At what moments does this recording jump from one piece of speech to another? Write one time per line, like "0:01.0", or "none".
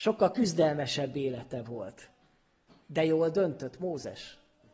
none